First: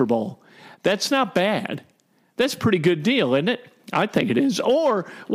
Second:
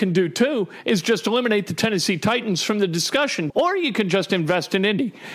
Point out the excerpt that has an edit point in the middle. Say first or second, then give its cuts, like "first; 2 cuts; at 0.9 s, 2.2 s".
second; 1 cut; at 3.5 s